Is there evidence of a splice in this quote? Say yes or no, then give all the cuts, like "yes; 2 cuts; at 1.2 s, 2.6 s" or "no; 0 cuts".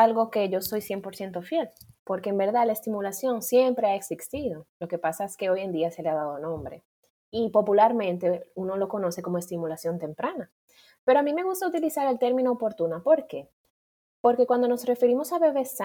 no; 0 cuts